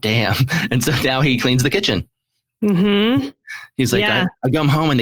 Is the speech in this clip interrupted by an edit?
no; 0 cuts

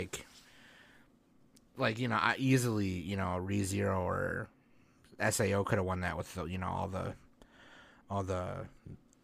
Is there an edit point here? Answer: no; 0 cuts

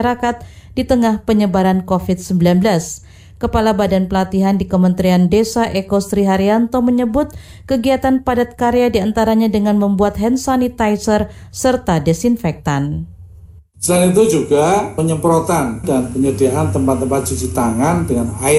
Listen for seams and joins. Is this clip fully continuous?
no; 1 cut; at 15.8 s

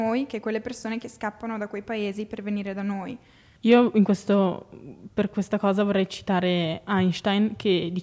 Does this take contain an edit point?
yes; 1 cut; at 3.6 s

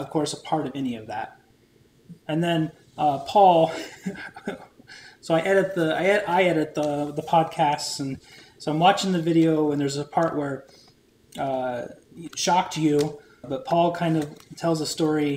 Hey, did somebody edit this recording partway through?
yes; 2 cuts; at 2.2 s, 13.4 s

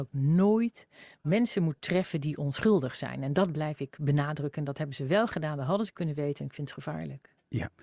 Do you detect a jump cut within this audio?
no; 0 cuts

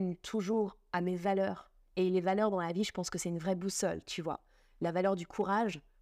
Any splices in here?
no; 0 cuts

